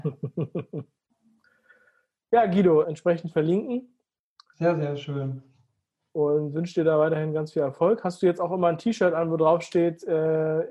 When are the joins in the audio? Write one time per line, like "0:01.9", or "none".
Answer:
0:02.8